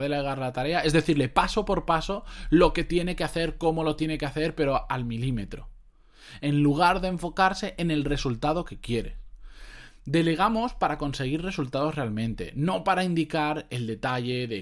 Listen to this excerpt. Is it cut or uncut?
uncut